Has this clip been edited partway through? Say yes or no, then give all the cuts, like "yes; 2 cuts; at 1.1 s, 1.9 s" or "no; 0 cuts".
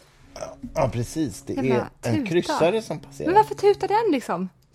no; 0 cuts